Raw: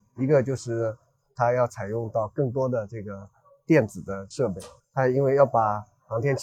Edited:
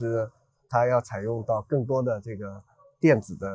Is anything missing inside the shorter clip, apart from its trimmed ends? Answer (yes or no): no